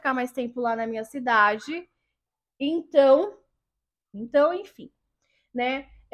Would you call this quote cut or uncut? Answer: cut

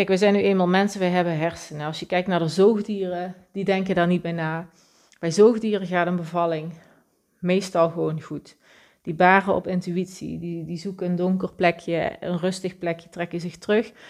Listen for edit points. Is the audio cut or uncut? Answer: uncut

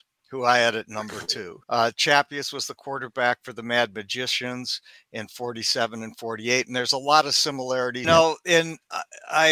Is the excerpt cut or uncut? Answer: cut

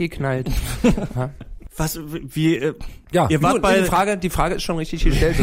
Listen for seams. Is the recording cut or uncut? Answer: uncut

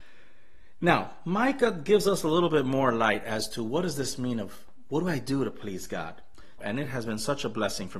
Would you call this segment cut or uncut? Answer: cut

